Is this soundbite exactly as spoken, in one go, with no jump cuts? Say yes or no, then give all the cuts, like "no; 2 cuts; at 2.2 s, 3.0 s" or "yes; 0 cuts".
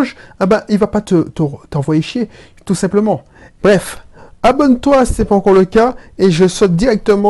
no; 1 cut; at 3.6 s